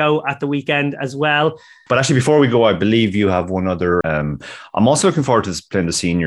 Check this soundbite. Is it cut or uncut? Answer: cut